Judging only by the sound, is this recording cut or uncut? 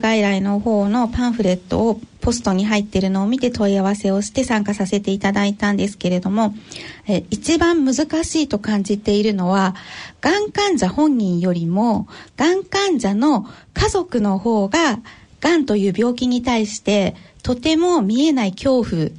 uncut